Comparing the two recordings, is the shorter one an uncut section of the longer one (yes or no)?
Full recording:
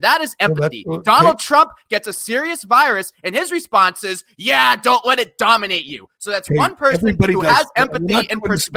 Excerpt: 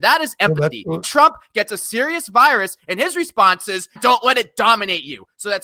no